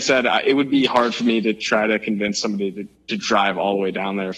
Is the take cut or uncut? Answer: uncut